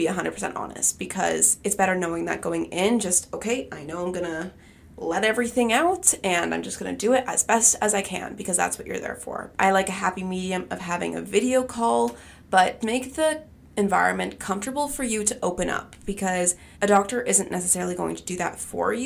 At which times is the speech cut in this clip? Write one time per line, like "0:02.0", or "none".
0:09.5
0:12.8
0:16.7